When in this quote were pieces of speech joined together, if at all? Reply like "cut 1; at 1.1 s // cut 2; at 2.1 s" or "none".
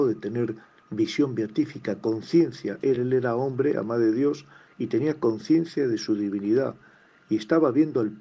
none